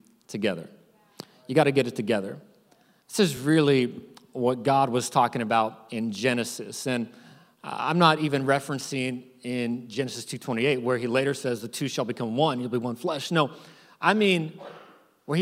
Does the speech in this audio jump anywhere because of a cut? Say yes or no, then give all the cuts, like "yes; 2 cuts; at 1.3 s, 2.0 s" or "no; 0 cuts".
no; 0 cuts